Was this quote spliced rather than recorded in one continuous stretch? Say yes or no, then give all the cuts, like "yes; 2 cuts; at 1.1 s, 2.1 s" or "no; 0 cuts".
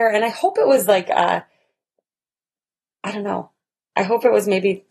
no; 0 cuts